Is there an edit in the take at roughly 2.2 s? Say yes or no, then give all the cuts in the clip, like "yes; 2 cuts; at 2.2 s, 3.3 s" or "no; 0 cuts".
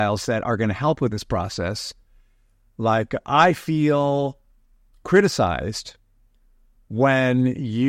no; 0 cuts